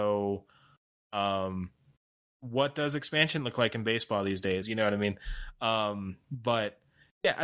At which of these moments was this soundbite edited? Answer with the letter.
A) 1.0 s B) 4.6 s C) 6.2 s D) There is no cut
B